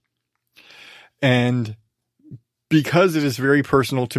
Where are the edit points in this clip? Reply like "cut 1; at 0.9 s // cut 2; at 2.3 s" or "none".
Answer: none

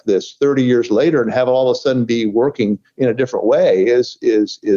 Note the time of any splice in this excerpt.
none

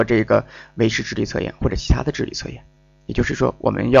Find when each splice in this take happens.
none

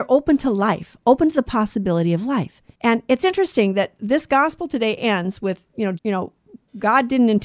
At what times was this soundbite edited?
cut 1; at 2.7 s // cut 2; at 6.0 s

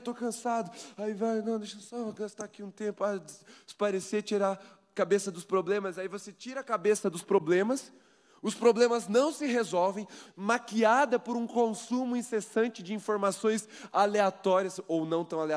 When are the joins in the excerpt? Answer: cut 1; at 10.3 s

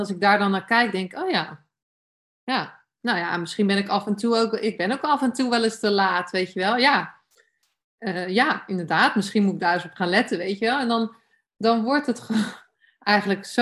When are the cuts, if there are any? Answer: none

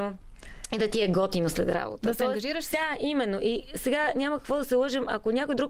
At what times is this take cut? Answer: cut 1; at 2.7 s

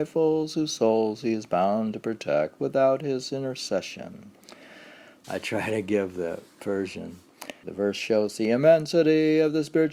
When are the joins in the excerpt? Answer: cut 1; at 5.2 s // cut 2; at 7.6 s

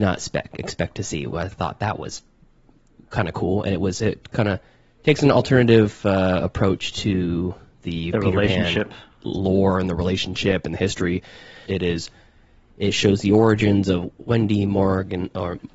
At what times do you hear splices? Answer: cut 1; at 11.7 s

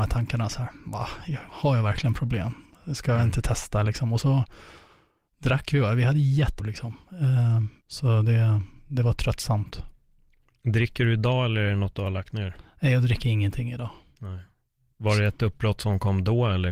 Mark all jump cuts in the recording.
cut 1; at 6.6 s // cut 2; at 7.8 s

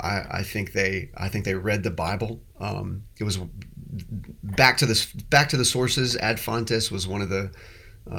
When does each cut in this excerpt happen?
none

